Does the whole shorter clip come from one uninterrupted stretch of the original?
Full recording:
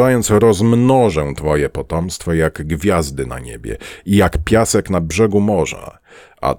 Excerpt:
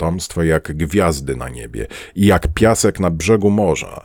yes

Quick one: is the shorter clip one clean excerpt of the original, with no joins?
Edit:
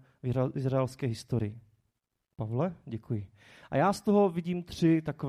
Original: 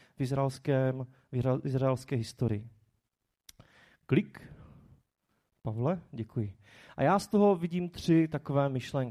no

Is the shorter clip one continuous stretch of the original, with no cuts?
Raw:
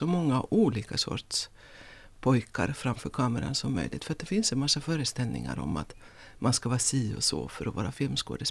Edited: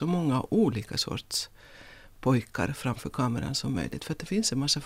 yes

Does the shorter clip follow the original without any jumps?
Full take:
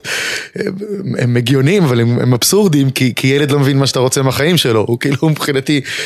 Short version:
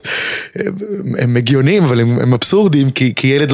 yes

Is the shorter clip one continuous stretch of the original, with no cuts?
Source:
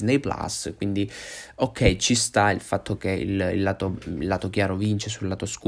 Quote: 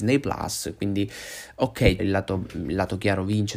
no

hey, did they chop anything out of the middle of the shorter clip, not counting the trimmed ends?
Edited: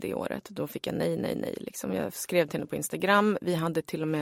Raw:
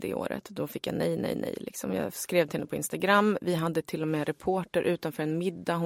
no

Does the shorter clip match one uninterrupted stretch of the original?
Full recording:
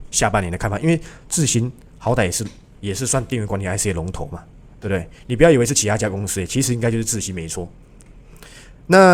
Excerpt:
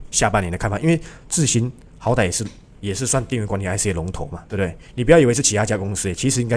no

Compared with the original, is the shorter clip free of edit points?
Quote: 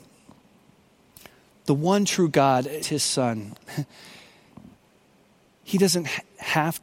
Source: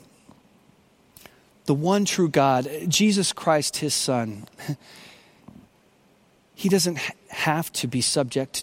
no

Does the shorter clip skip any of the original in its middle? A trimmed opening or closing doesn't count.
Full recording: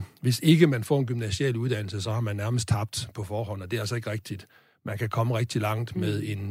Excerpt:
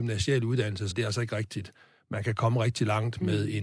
yes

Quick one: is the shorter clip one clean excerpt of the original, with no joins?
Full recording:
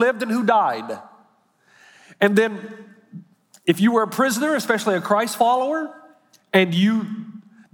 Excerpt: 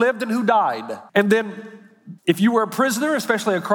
no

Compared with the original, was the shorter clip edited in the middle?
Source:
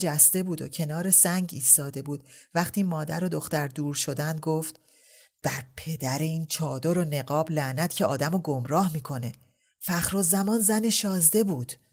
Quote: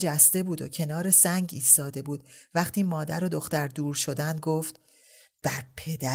no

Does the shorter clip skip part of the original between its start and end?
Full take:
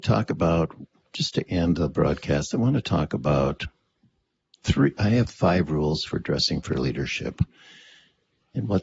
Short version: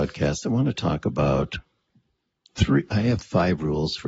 no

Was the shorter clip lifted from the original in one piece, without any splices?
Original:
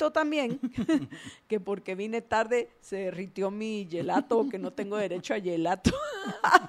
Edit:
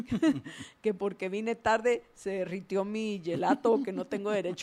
yes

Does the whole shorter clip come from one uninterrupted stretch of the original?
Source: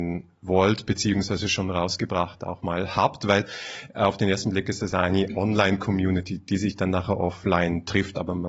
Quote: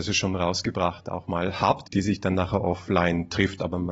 no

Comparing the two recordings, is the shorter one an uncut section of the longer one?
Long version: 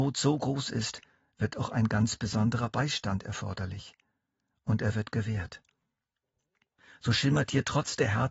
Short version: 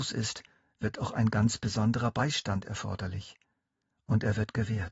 yes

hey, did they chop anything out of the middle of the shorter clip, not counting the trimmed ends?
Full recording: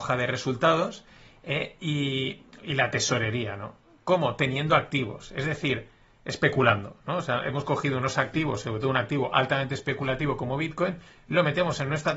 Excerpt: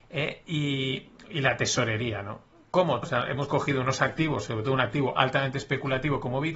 yes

